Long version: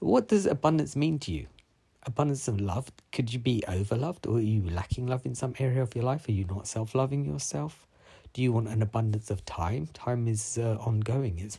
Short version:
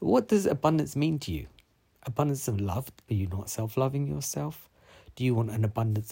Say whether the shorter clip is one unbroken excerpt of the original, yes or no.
no